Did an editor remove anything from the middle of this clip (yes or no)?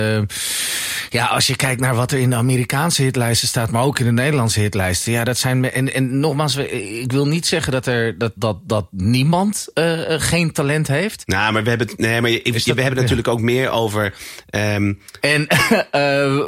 yes